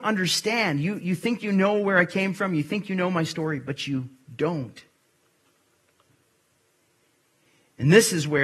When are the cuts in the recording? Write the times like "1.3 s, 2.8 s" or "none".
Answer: none